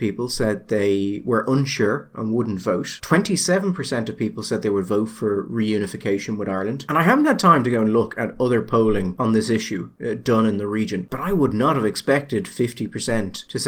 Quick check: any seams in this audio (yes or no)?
yes